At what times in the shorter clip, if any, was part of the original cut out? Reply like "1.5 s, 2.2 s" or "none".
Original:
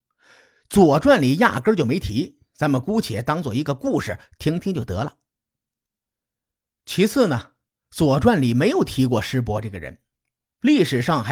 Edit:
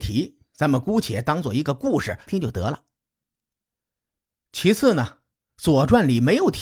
2.3 s